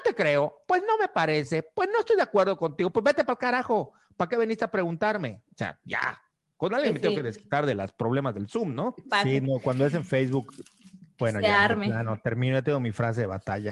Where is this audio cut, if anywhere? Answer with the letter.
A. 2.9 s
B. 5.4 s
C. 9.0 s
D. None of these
C